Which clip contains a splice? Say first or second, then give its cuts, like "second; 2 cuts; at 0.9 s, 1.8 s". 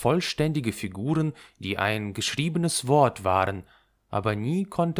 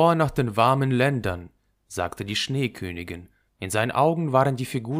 second; 1 cut; at 3.5 s